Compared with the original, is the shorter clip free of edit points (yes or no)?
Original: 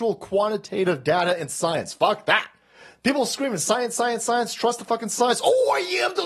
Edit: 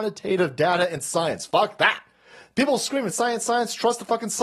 no